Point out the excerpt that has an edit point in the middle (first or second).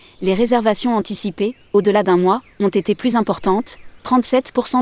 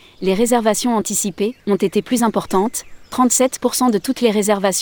second